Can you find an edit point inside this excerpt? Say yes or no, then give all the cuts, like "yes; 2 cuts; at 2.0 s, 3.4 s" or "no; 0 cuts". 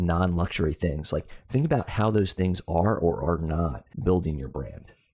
yes; 1 cut; at 3.9 s